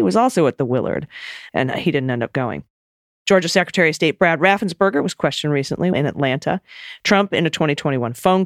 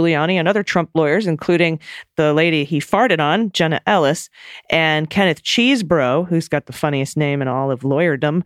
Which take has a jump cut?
first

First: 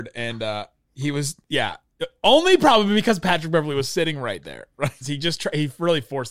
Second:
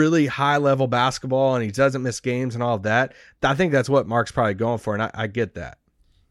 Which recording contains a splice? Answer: first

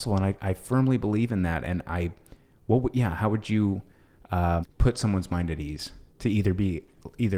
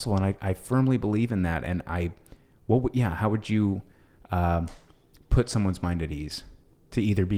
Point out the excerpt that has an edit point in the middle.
first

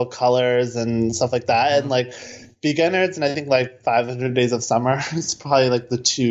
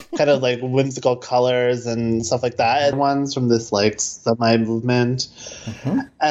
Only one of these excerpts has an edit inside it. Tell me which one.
second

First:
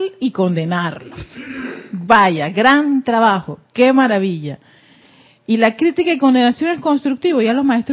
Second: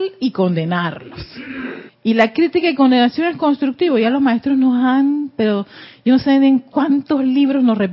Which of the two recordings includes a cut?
second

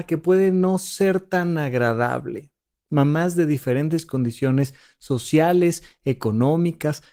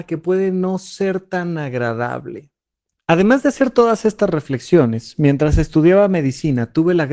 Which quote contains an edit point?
first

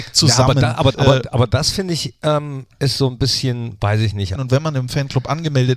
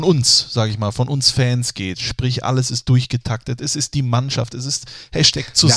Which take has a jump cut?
first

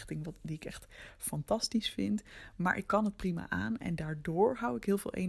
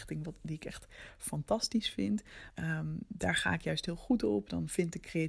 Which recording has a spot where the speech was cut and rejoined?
second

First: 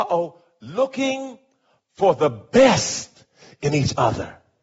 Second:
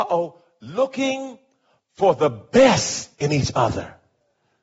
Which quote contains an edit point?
second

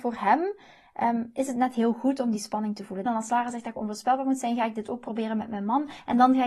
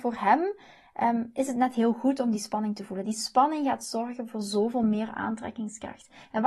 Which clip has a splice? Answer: first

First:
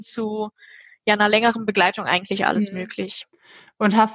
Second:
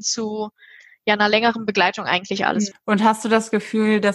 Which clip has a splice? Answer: second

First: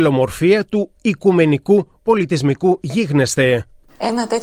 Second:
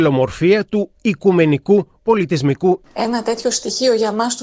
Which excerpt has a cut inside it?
second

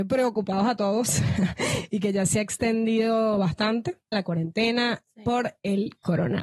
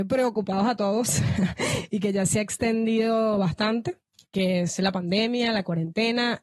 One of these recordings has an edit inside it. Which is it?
first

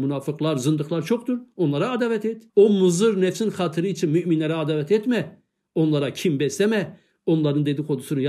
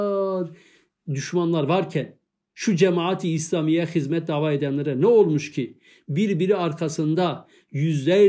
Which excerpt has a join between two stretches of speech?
first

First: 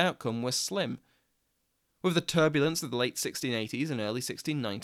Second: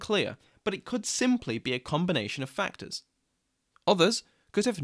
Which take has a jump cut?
second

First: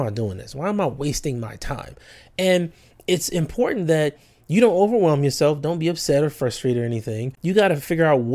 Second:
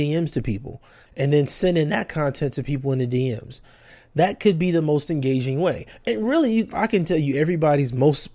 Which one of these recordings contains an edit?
second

